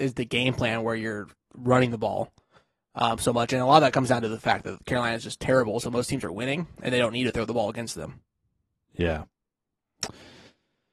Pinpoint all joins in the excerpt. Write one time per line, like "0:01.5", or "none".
none